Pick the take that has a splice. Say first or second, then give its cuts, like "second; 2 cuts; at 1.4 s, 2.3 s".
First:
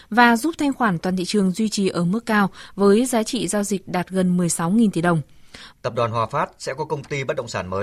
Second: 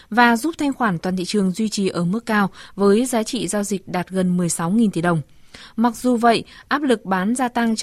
first; 1 cut; at 5.7 s